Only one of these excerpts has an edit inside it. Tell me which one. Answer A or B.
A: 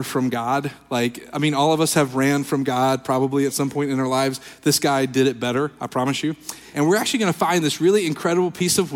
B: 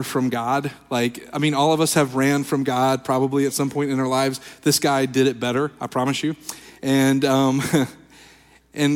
A